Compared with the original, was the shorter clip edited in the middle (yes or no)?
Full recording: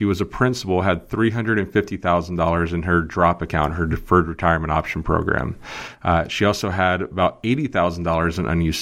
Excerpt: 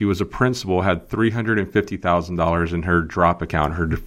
no